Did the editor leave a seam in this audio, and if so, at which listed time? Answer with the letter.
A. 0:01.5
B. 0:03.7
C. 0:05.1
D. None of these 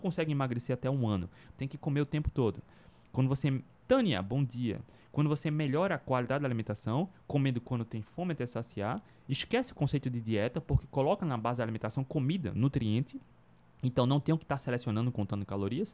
A